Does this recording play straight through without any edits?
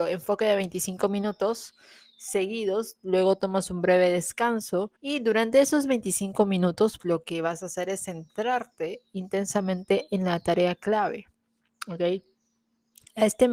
no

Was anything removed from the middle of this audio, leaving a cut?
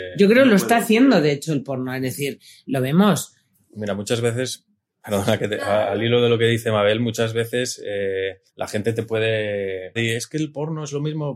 yes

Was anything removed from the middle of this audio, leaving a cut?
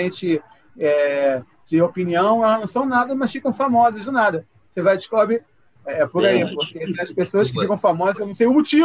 yes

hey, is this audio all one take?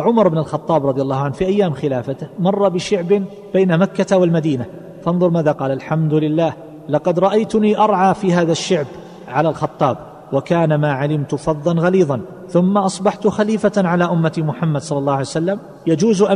no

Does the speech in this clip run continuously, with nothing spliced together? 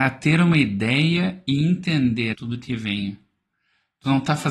no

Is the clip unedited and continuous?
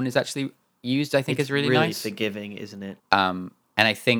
no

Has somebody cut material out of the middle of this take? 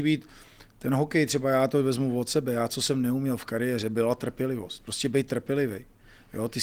no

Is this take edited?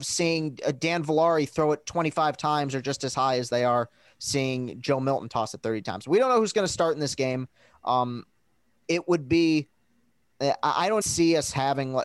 yes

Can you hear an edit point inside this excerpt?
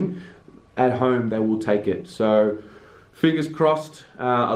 no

